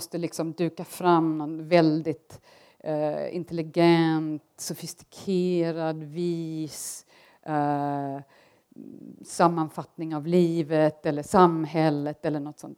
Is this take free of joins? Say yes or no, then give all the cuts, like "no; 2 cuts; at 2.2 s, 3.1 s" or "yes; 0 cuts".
yes; 0 cuts